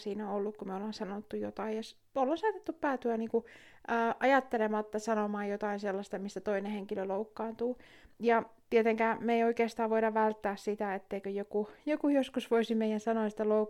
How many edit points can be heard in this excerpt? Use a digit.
0